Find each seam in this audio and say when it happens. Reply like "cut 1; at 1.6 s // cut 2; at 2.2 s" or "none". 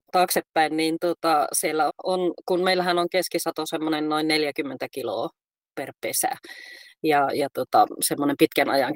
cut 1; at 1.9 s